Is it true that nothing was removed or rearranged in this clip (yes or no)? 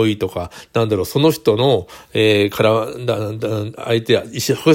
yes